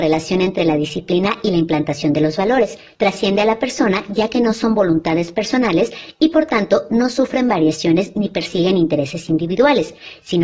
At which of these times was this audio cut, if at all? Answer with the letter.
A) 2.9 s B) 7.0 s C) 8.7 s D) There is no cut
A